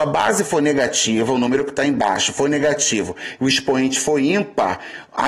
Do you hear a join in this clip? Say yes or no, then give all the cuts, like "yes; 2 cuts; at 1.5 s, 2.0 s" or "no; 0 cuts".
no; 0 cuts